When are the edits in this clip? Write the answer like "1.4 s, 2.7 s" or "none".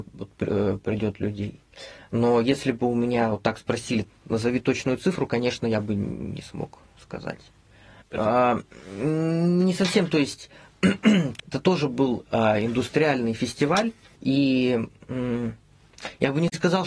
8.0 s, 11.4 s, 14.2 s